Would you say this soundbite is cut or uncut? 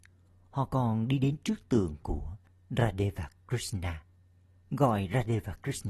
uncut